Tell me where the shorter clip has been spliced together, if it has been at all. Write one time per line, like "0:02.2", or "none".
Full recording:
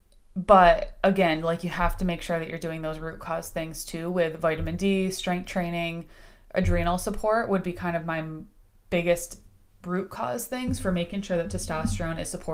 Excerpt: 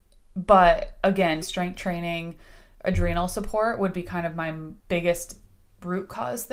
0:01.4
0:04.8